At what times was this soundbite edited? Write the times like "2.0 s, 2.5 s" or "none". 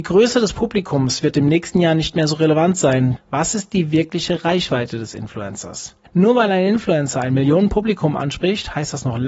3.2 s, 6.1 s